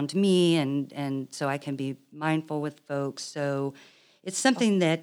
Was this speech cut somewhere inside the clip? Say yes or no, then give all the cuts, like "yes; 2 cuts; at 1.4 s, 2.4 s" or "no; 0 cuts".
no; 0 cuts